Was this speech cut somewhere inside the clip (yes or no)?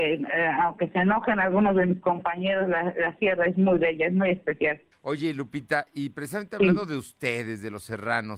yes